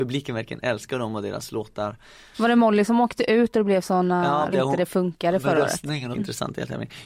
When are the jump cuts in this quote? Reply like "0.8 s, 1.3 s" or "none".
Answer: 2.3 s, 4.5 s, 6.1 s